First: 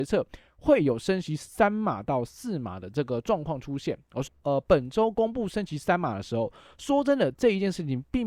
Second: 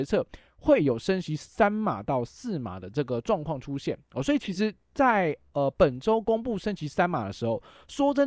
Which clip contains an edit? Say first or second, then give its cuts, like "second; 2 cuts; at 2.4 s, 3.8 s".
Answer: first; 1 cut; at 4.2 s